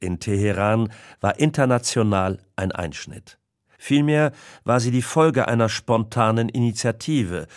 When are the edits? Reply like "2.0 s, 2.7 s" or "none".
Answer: 3.8 s